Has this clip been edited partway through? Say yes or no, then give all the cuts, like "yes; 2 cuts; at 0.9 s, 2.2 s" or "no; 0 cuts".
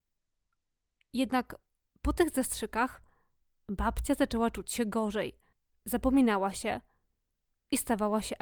no; 0 cuts